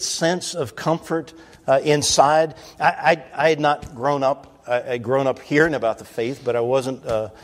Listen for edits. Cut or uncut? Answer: uncut